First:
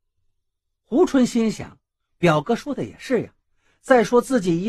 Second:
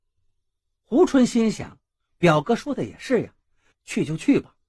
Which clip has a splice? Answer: second; 1 cut; at 3.7 s

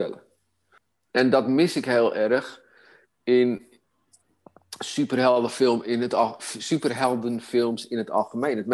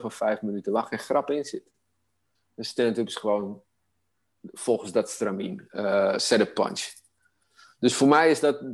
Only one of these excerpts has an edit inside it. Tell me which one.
second; 1 cut; at 2.4 s

